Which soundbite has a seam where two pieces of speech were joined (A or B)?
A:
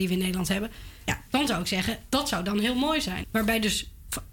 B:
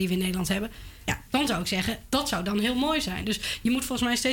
A